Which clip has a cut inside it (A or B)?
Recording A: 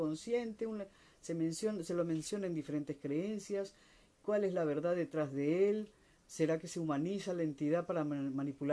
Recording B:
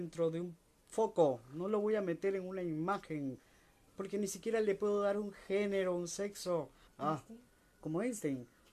B